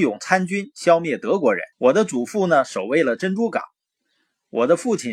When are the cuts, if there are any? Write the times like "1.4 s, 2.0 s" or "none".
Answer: 1.7 s